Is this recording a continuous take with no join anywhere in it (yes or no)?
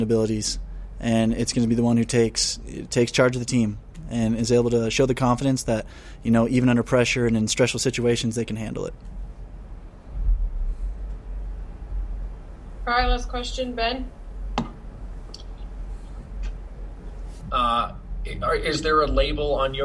no